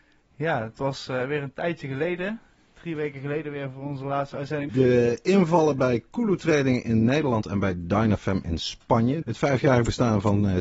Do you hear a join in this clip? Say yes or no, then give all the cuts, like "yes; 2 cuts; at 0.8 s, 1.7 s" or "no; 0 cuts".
yes; 2 cuts; at 4.7 s, 9.2 s